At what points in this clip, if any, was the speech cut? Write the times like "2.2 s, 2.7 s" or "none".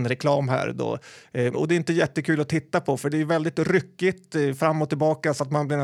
1.5 s